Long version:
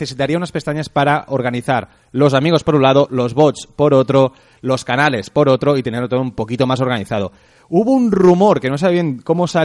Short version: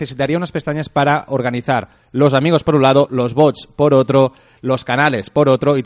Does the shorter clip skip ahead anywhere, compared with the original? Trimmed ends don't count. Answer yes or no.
no